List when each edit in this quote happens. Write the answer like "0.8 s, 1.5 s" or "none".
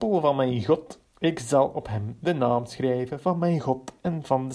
1.1 s